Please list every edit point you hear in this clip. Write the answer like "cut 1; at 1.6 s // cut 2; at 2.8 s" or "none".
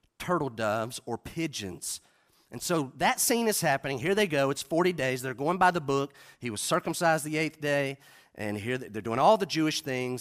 none